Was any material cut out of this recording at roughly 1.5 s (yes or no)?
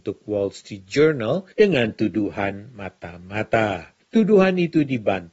yes